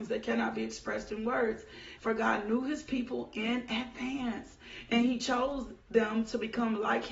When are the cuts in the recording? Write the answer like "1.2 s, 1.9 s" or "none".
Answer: 2.0 s